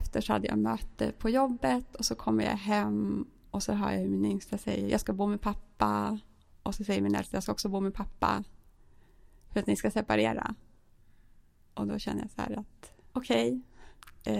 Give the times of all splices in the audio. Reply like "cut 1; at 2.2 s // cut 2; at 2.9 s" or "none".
cut 1; at 13.1 s